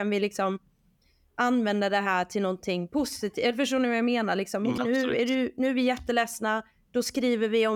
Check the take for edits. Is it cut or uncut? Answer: cut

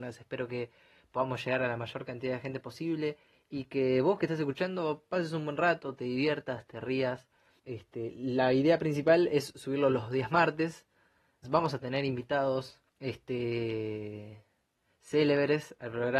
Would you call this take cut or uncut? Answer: cut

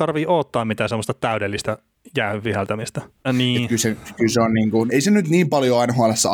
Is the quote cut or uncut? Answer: cut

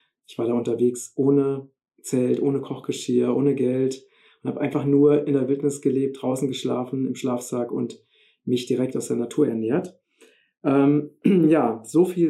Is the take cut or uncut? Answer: uncut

